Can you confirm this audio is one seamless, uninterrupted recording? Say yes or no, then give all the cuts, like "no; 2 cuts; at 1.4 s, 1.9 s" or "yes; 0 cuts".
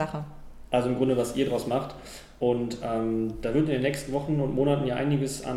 yes; 0 cuts